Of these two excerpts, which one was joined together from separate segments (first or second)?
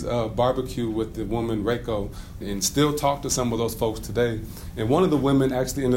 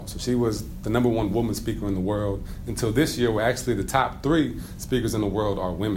first